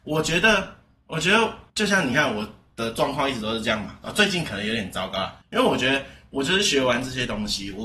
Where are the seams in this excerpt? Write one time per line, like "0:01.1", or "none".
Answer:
0:01.7
0:04.0
0:05.4